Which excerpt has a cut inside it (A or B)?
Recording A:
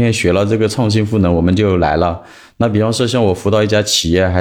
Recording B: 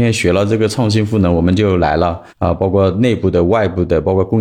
B